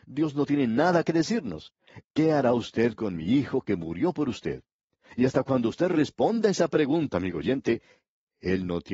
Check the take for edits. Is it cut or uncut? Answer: cut